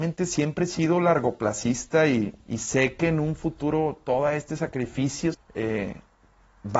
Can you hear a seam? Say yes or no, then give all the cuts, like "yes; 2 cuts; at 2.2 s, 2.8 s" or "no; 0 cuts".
yes; 2 cuts; at 2.4 s, 5.3 s